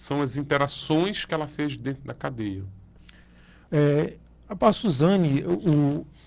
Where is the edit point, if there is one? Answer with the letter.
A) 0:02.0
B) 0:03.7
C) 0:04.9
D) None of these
B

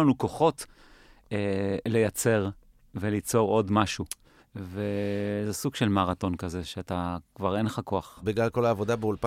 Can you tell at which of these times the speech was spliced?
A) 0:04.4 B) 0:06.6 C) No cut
A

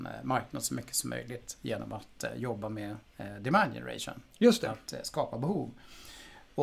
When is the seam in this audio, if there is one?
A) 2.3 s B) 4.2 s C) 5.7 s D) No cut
D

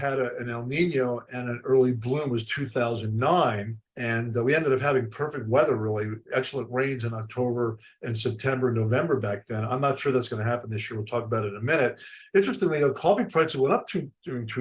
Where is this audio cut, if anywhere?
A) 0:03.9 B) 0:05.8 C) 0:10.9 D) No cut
A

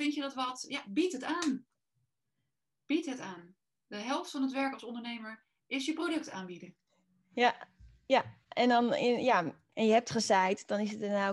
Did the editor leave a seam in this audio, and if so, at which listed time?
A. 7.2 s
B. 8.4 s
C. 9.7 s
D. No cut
C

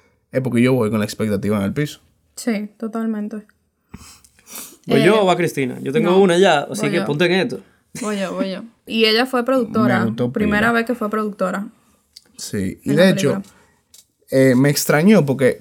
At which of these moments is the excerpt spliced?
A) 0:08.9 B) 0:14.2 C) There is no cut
A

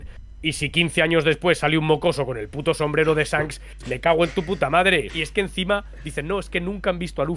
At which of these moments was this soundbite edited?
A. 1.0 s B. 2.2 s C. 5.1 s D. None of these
C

